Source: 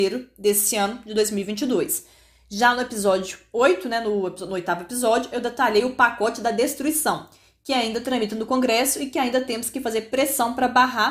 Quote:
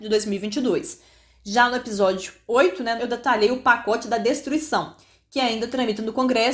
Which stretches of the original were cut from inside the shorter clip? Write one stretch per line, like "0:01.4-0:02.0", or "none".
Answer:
0:04.0-0:05.3